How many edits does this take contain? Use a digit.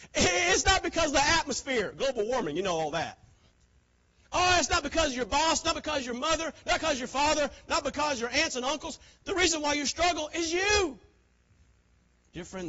0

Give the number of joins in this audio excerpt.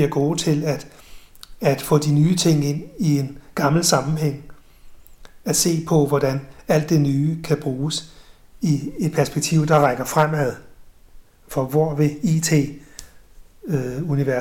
0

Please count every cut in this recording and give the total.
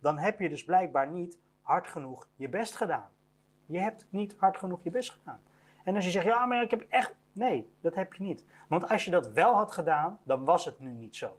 1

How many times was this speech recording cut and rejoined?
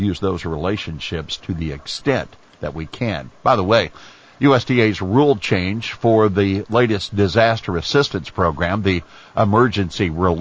0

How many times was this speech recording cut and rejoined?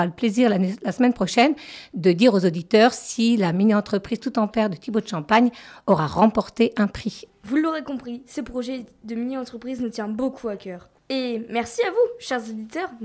2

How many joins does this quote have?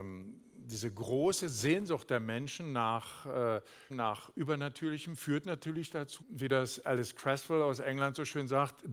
2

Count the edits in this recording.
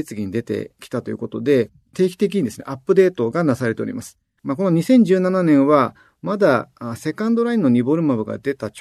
2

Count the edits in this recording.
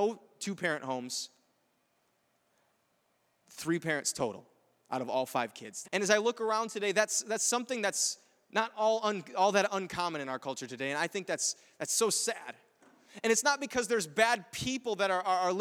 1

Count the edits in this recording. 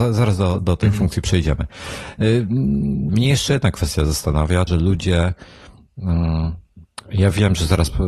2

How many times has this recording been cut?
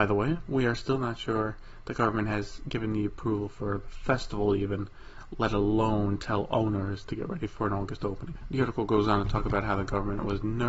1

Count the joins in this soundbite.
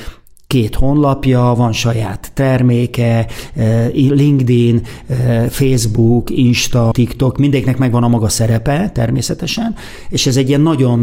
1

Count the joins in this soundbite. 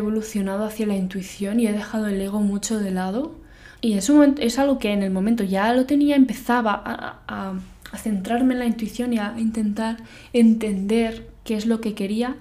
1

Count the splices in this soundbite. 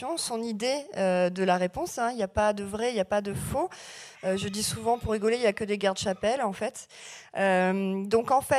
0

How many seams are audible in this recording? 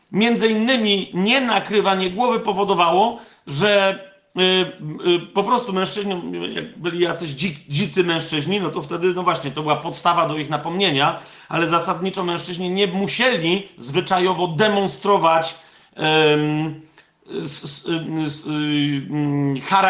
0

